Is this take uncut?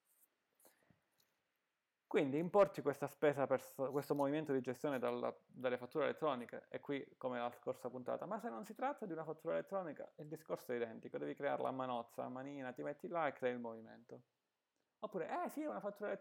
yes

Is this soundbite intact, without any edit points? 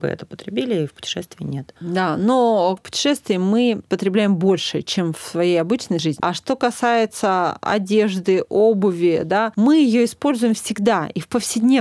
no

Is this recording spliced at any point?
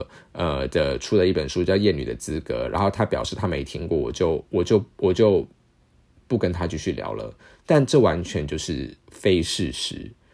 yes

